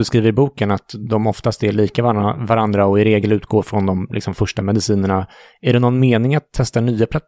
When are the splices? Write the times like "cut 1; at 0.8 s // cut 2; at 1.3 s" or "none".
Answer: none